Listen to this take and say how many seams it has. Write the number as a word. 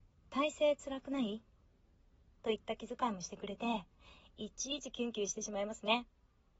zero